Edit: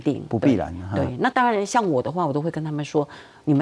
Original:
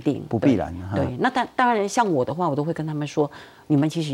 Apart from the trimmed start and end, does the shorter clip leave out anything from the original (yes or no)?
yes